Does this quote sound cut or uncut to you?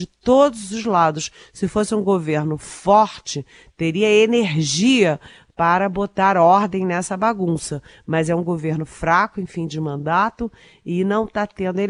uncut